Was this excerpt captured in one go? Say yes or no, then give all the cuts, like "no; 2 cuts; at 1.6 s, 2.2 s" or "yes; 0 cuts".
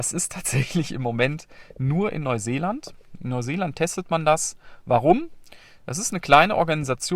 yes; 0 cuts